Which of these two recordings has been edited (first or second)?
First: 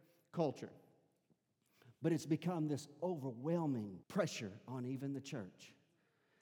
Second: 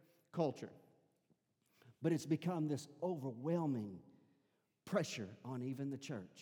first